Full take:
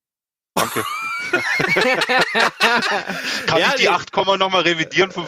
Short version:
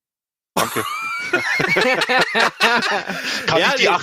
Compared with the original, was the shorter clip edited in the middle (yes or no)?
no